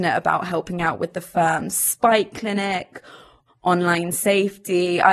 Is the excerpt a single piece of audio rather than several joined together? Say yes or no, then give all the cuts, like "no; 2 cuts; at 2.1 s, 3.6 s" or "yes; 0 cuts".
no; 1 cut; at 3.5 s